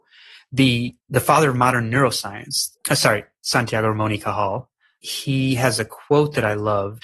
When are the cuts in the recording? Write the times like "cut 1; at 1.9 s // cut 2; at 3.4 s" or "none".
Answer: cut 1; at 1.0 s // cut 2; at 2.7 s